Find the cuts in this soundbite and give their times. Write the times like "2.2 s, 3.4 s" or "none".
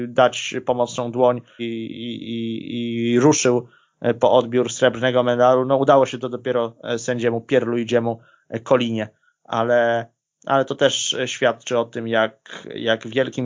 1.6 s